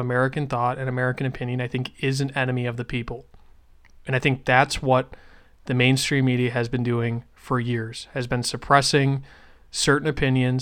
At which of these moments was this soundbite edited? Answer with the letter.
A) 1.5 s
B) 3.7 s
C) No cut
C